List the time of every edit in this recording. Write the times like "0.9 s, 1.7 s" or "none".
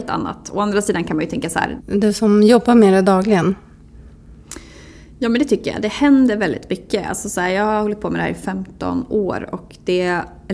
1.8 s